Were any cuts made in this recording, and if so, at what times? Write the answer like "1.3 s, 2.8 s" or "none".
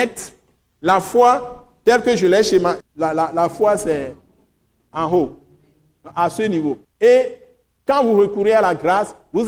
2.8 s, 6.8 s

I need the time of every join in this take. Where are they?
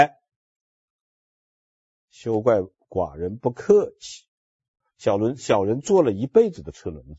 4.8 s

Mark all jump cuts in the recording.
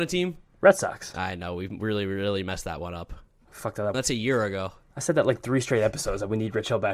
1.1 s, 3.9 s

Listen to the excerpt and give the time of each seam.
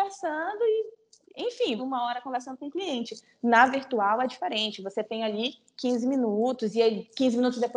1.8 s

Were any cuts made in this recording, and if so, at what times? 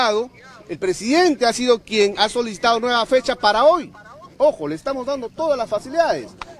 2.2 s

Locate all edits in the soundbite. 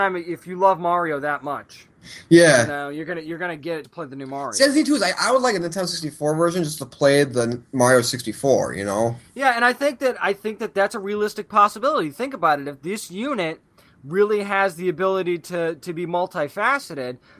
3.8 s

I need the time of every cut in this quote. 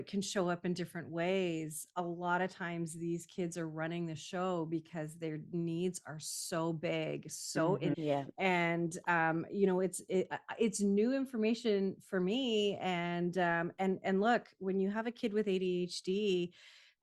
7.9 s

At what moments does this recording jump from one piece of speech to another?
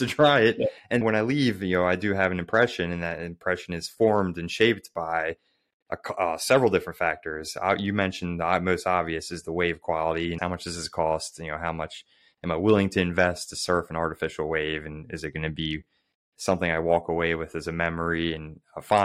1.0 s, 10.4 s

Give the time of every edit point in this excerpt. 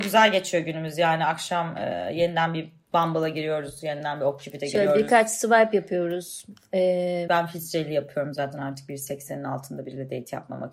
7.3 s

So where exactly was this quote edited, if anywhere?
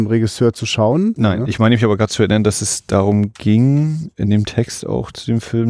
1.2 s

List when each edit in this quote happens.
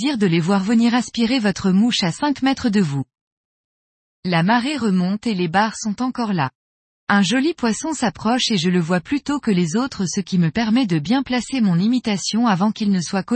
4.1 s

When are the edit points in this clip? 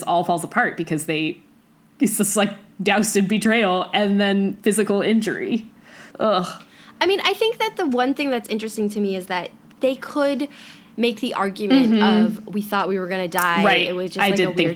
6.1 s

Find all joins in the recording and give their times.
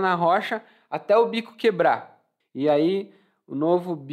2.4 s

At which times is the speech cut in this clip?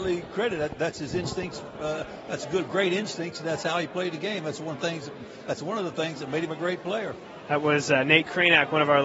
none

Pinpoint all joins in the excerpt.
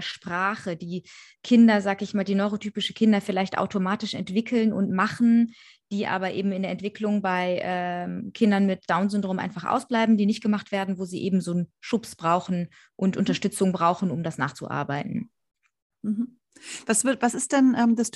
none

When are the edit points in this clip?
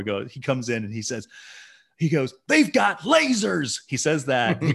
none

